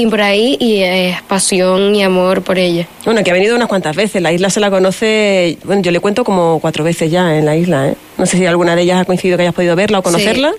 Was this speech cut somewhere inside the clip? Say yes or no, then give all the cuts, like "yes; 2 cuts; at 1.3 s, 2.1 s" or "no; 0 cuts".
no; 0 cuts